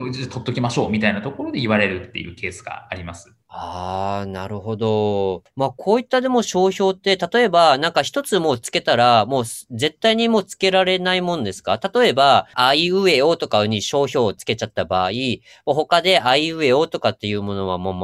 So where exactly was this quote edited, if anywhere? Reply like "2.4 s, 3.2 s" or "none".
3.4 s